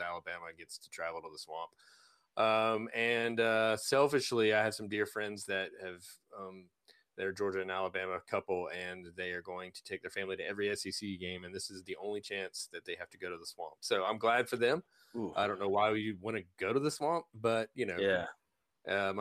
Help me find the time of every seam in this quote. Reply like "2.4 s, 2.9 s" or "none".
none